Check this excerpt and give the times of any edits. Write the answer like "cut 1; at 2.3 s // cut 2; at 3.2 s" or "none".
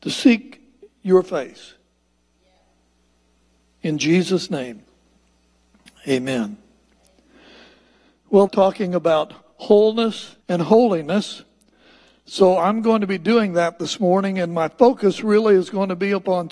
cut 1; at 8.5 s // cut 2; at 10.4 s